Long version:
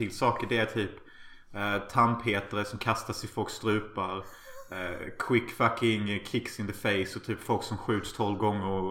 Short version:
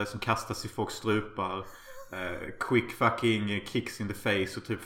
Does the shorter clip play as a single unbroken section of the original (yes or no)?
yes